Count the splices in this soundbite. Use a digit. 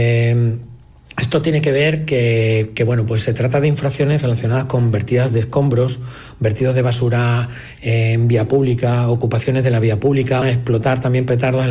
1